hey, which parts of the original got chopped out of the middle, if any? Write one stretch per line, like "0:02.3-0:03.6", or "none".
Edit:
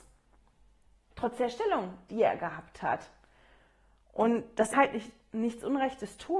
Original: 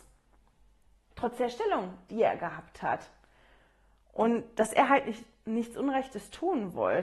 0:04.7-0:04.9